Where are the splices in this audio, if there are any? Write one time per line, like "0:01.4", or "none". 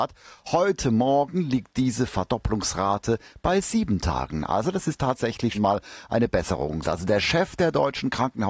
0:05.5
0:06.8